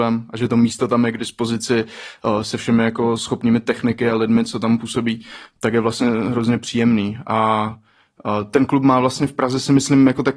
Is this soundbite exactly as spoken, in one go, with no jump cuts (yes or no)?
yes